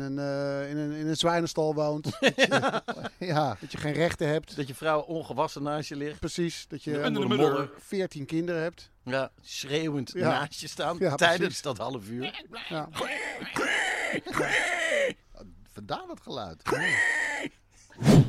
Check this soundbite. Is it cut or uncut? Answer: uncut